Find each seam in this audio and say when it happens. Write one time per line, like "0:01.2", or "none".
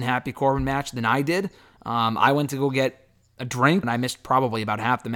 0:03.8